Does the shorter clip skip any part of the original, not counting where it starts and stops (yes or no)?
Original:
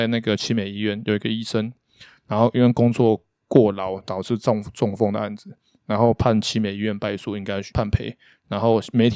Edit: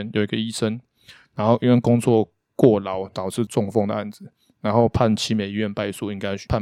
yes